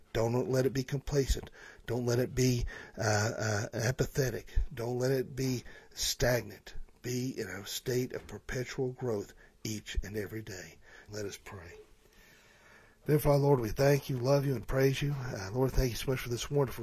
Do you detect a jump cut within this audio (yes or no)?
yes